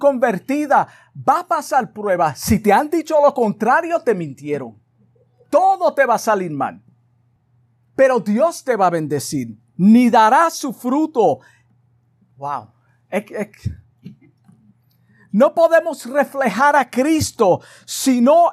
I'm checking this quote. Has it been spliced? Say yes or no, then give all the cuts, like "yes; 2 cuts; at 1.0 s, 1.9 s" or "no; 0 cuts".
yes; 1 cut; at 9.7 s